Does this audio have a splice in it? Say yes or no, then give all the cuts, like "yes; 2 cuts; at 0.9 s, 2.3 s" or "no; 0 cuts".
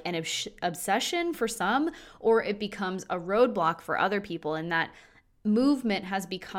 no; 0 cuts